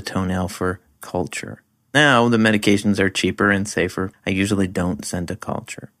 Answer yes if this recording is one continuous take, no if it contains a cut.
no